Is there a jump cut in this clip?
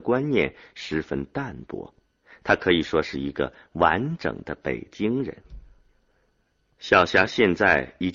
no; 0 cuts

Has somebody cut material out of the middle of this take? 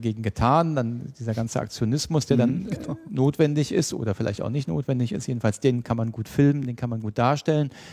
no; 0 cuts

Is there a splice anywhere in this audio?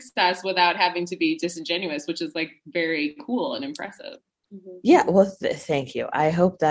no; 0 cuts

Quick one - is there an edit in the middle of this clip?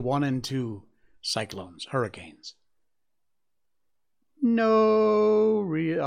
no; 0 cuts

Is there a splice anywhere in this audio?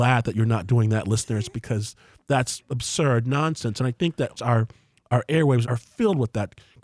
yes; 2 cuts; at 4.4 s, 5.6 s

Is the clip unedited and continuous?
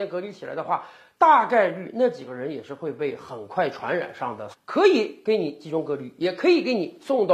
no; 1 cut; at 4.5 s

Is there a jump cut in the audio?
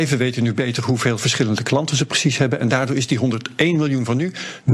no; 0 cuts

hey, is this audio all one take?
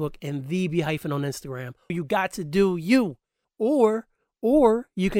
no; 2 cuts; at 1.9 s, 3.4 s

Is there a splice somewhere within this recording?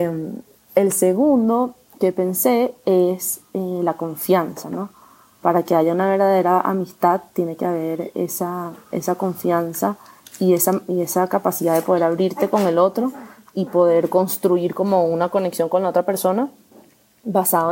no; 0 cuts

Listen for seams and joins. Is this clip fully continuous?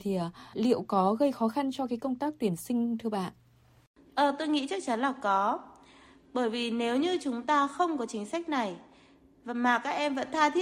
yes; 0 cuts

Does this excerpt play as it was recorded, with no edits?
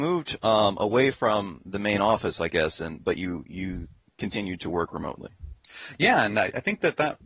yes; 0 cuts

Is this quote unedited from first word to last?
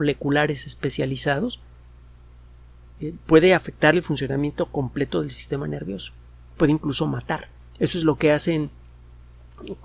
yes; 0 cuts

